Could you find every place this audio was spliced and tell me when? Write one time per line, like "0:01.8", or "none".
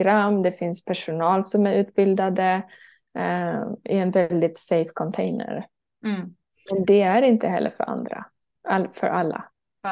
none

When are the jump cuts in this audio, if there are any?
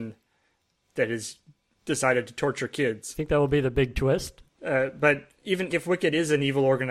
0:04.5
0:05.7

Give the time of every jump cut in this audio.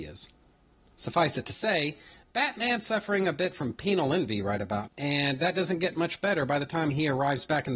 0:04.9

